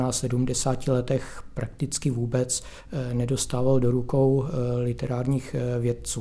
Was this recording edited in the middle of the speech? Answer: no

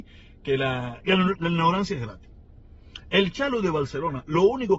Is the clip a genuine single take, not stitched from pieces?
no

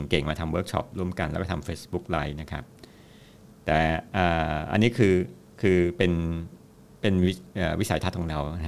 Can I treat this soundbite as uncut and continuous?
yes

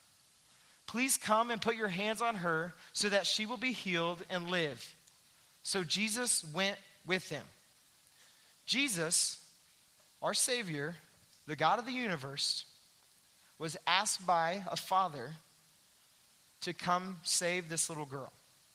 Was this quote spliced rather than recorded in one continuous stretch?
no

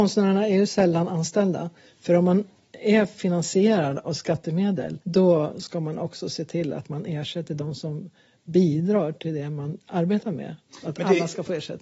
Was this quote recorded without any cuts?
no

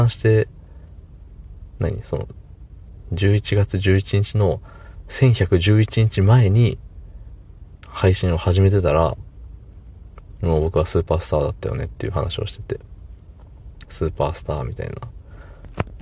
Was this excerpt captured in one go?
no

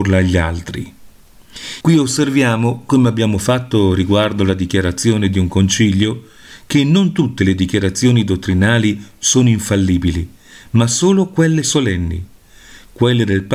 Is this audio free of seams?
no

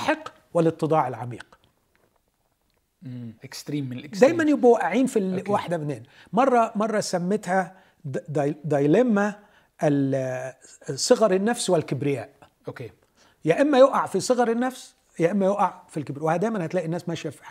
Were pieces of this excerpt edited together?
yes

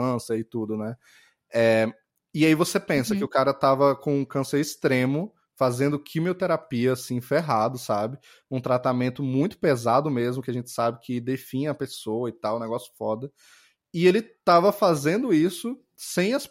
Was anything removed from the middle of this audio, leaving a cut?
no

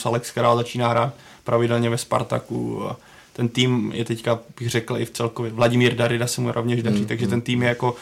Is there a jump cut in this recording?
no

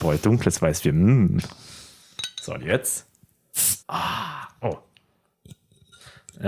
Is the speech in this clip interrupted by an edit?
yes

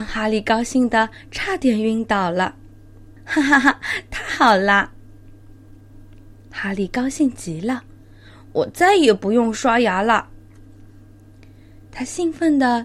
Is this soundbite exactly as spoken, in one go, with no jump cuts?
no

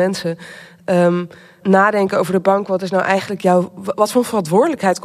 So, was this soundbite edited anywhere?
yes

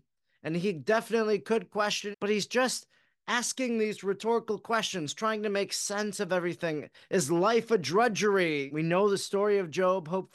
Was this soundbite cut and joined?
yes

